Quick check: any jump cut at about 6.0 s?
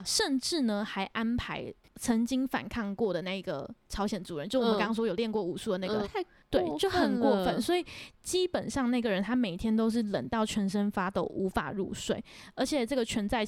yes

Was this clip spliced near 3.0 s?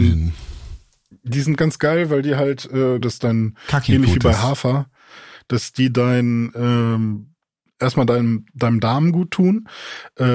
yes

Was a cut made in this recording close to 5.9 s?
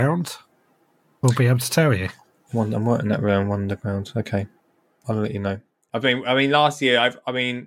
yes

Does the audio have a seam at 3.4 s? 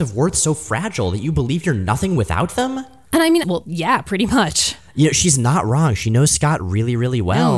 yes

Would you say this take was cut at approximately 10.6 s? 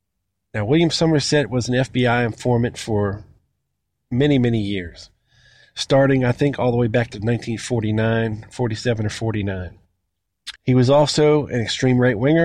yes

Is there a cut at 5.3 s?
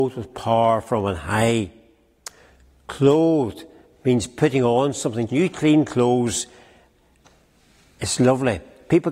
yes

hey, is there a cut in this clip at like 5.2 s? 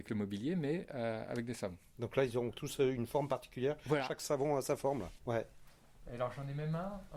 yes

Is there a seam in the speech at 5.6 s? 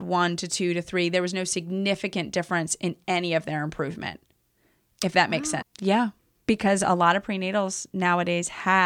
yes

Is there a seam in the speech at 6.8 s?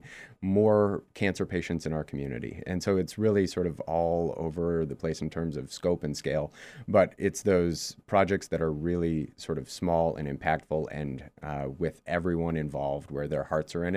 no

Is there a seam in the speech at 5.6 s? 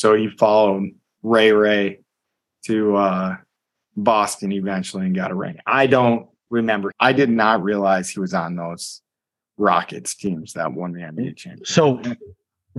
no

